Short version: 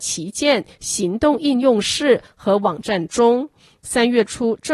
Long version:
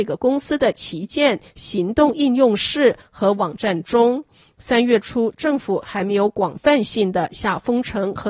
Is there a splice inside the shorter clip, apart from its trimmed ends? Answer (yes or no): no